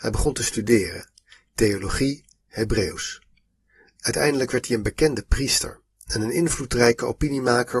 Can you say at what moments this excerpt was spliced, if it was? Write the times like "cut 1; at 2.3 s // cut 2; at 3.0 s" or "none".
cut 1; at 2.4 s